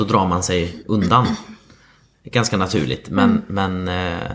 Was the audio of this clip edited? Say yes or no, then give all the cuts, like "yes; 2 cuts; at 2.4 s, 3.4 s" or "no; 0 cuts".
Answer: no; 0 cuts